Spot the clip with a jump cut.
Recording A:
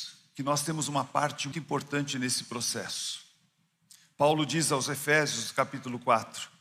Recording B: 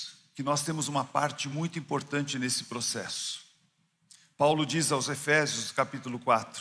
A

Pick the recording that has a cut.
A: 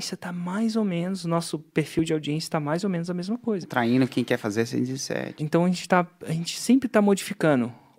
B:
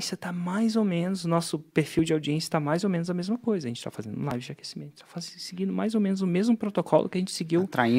A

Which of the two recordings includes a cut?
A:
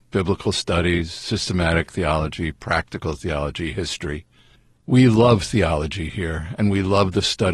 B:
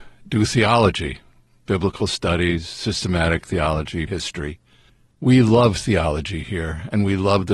B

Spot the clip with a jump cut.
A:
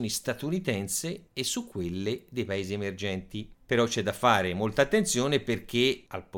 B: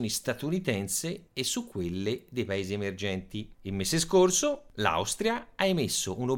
B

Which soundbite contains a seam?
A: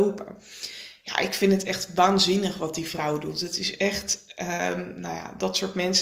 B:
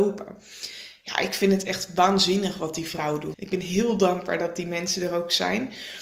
B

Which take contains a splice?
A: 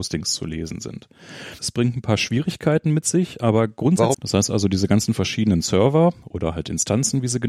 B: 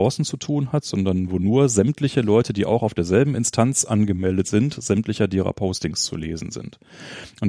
A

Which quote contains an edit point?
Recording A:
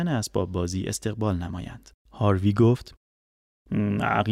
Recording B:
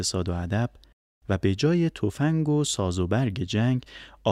A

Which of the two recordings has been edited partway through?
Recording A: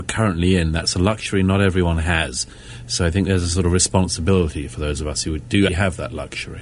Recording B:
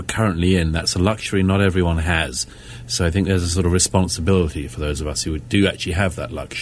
A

